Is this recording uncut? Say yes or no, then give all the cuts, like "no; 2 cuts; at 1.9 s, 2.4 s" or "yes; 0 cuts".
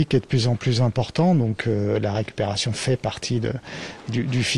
yes; 0 cuts